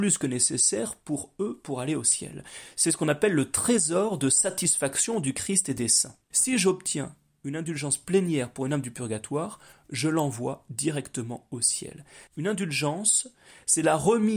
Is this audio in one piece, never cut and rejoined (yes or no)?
no